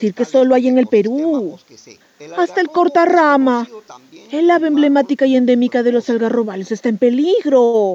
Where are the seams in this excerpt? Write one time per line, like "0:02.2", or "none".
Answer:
0:02.0

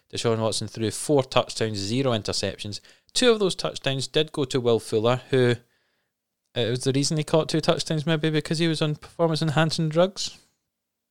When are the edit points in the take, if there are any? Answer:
none

